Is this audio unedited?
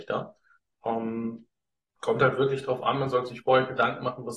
yes; 0 cuts

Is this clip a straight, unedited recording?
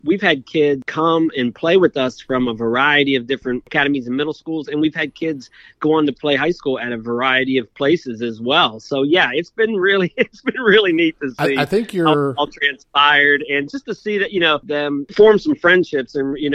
yes; 0 cuts

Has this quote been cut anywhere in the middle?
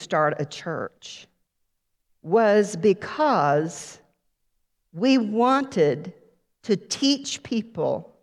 no; 0 cuts

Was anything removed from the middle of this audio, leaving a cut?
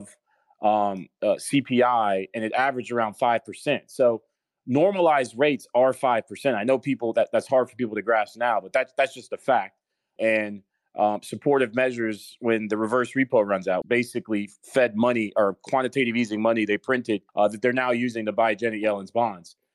yes; 3 cuts; at 10.2 s, 13.8 s, 17.3 s

